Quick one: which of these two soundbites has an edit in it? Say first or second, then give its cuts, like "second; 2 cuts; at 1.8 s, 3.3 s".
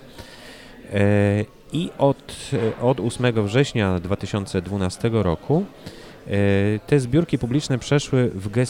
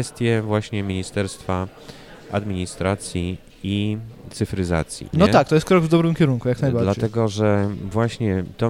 second; 1 cut; at 5.1 s